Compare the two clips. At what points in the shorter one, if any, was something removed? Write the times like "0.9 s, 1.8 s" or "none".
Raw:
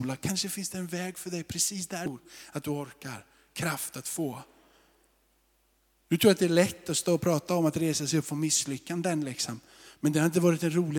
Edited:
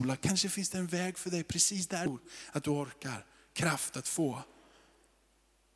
none